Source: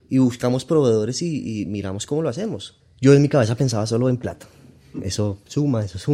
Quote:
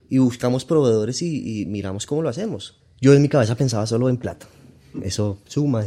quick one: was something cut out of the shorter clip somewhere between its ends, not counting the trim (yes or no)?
no